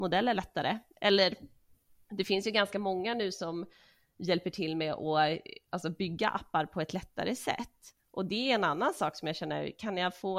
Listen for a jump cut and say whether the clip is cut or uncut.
cut